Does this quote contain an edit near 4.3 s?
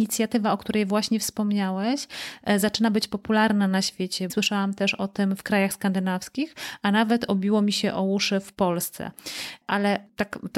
yes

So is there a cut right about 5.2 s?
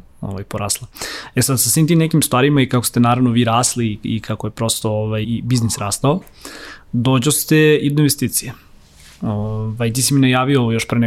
yes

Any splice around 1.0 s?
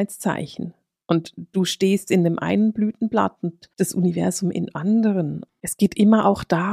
no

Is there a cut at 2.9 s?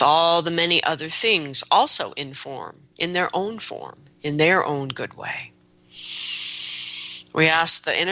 no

